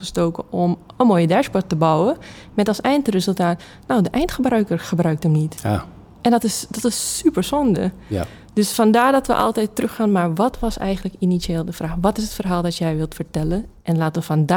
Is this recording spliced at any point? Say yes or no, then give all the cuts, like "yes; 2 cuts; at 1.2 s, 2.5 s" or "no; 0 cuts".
no; 0 cuts